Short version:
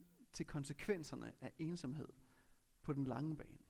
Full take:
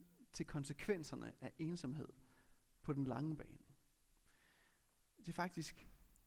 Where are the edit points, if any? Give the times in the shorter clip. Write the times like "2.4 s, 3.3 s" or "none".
none